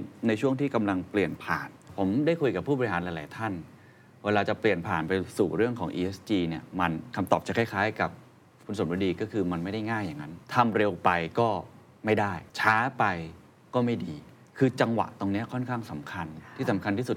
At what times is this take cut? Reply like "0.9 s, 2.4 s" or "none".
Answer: 10.4 s, 12.5 s

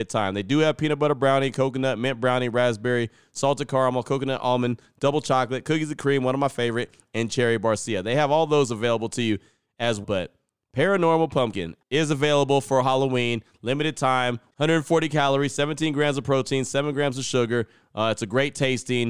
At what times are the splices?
10.0 s, 14.5 s

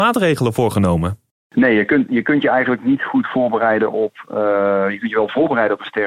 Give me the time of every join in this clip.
none

